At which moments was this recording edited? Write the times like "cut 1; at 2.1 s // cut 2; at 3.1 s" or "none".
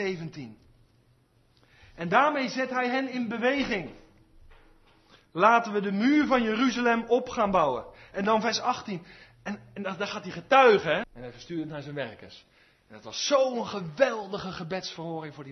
cut 1; at 11.0 s